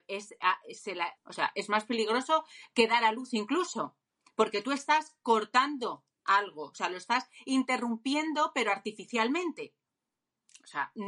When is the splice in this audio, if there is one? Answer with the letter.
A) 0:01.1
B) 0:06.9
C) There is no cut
A